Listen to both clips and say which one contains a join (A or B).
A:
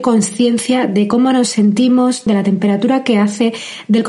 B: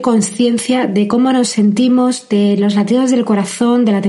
A